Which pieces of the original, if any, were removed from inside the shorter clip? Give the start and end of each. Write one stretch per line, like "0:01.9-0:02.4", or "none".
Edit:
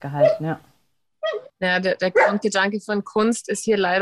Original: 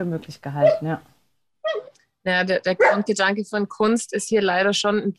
0:01.9-0:02.1